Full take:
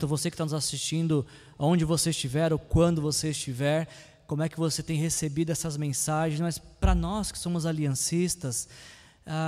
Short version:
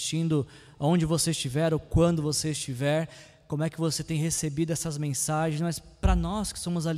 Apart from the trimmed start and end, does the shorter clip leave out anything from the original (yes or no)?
no